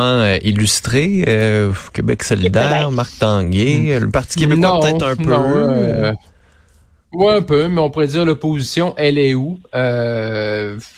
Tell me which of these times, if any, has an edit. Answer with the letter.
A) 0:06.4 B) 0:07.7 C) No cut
C